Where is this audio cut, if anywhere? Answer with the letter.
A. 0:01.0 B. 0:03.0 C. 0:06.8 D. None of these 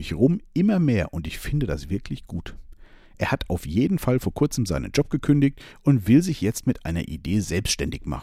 D